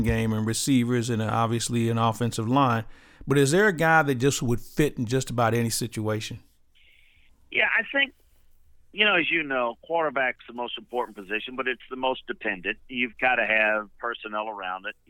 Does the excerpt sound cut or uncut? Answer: uncut